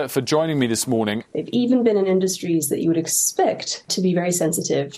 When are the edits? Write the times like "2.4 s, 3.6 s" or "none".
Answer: 1.2 s, 3.9 s